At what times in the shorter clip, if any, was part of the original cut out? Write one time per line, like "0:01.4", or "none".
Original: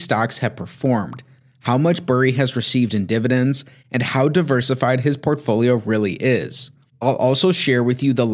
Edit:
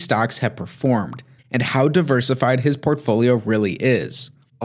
0:01.4

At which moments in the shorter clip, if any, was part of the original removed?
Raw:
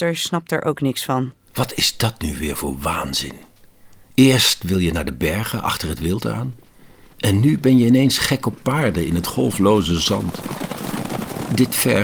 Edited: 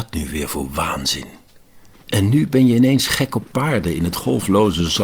0:01.9

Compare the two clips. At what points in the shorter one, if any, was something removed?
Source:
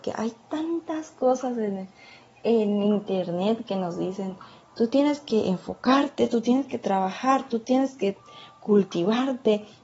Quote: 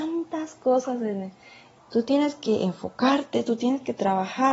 0:01.8

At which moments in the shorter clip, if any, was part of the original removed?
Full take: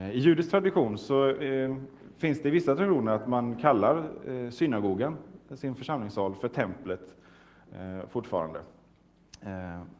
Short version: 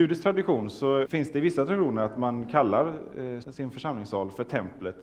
0:01.0
0:03.4

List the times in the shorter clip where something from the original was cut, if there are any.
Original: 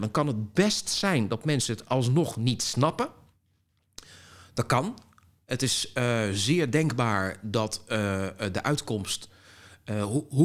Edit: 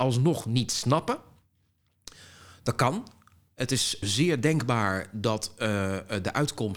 0:04.0

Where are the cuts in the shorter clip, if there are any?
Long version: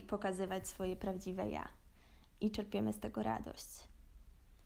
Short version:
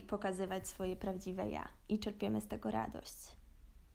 0:01.8

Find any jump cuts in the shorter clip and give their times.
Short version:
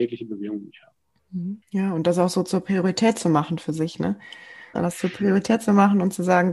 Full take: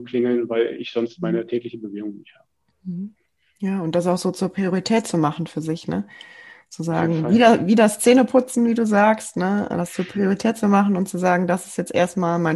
0:01.6
0:04.7

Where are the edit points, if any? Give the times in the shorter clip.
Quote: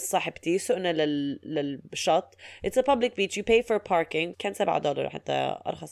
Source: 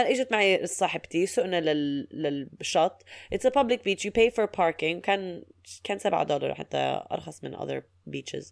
0:04.3

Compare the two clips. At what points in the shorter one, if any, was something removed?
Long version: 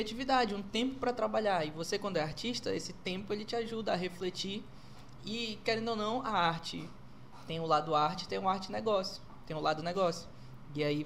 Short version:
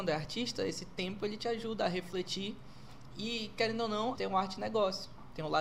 0:04.1

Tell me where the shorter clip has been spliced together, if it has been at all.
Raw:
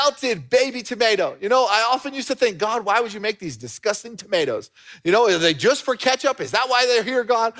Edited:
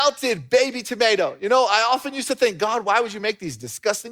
none

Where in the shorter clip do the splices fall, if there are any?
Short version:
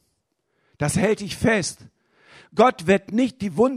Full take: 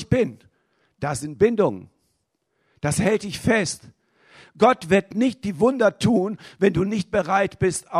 none

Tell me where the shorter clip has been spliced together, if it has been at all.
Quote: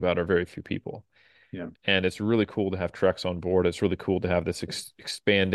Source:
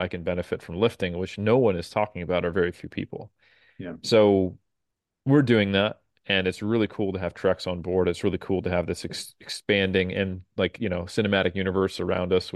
0:01.7

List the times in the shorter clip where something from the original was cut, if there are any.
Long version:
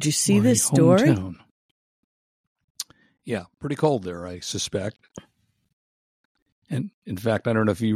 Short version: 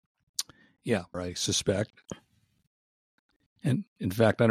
0:01.1

